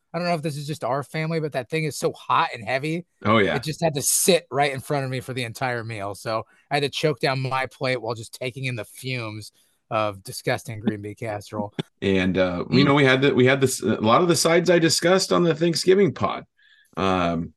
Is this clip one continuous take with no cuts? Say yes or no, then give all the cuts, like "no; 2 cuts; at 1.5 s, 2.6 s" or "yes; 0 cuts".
no; 1 cut; at 11.9 s